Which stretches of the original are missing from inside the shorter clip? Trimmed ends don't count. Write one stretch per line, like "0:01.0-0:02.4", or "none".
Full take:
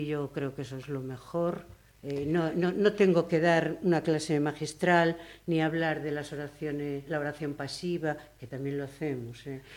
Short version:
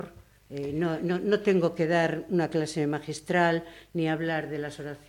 none